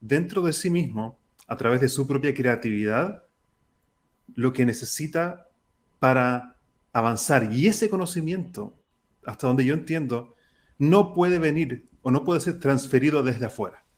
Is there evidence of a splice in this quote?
no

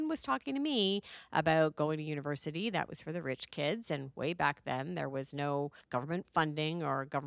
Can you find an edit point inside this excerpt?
no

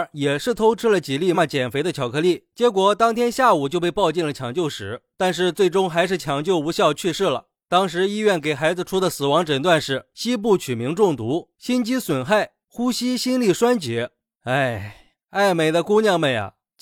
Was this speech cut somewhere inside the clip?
yes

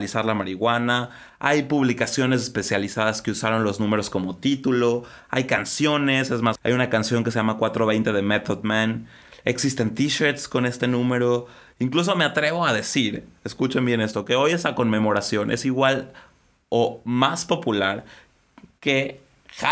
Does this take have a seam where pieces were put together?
no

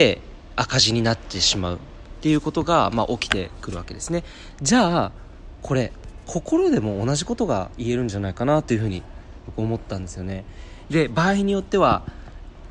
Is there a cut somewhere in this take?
yes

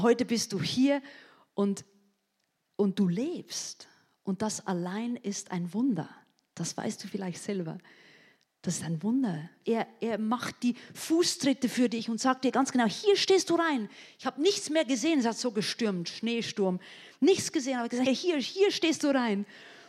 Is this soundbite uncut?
no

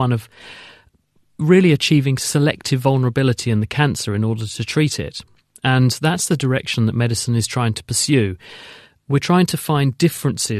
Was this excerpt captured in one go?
yes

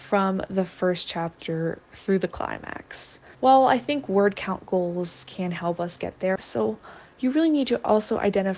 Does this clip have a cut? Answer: yes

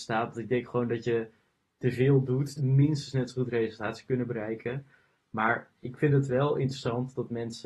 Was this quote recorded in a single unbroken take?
no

